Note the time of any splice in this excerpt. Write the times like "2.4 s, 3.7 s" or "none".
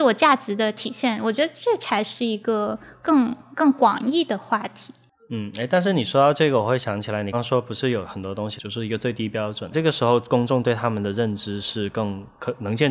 7.3 s, 8.6 s, 9.7 s